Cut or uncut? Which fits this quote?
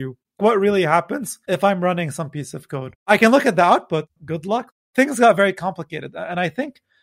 cut